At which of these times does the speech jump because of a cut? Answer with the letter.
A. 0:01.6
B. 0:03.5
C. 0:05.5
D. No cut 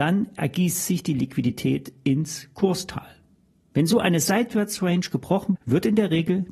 C